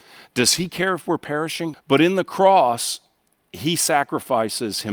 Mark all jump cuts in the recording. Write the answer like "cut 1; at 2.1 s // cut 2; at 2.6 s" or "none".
cut 1; at 1.7 s